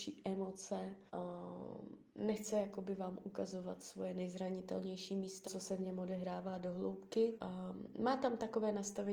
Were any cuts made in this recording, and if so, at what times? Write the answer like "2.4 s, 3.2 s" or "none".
1.1 s, 5.4 s, 7.3 s